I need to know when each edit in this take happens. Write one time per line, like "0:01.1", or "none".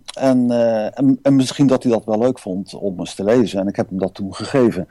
none